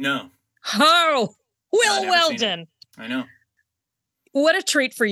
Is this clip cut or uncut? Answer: uncut